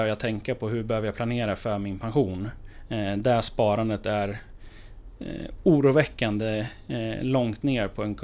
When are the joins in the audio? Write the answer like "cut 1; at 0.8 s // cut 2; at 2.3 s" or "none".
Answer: none